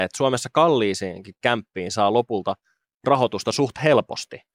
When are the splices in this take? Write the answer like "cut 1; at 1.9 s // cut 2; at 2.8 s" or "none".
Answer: none